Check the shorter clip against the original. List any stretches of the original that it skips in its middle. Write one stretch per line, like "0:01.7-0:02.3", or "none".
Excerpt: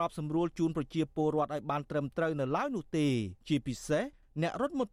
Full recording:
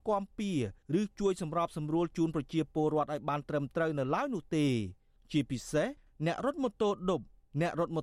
0:05.0-0:05.2